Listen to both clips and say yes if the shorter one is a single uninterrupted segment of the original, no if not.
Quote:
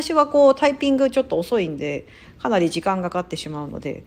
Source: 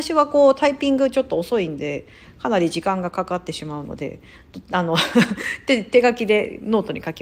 no